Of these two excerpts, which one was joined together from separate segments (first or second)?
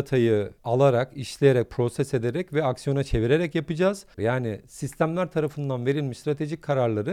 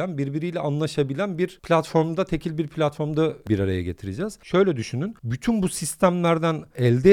first